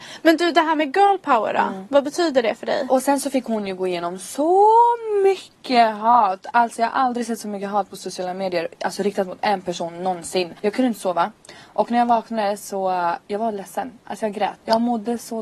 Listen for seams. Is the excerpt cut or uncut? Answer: cut